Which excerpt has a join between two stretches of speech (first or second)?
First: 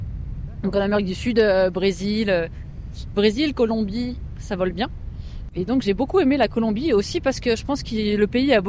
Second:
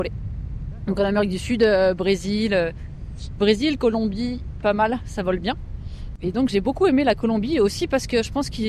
first